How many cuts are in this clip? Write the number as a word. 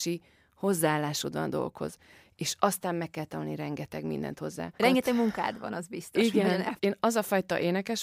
two